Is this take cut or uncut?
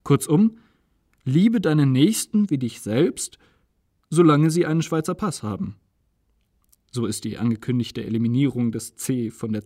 uncut